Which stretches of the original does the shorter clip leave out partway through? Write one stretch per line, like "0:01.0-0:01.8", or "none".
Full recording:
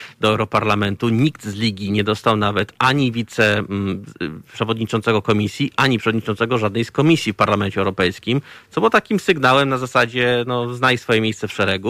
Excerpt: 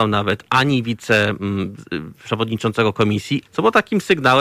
0:05.7-0:08.6